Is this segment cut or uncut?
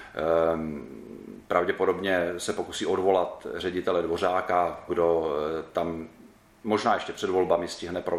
cut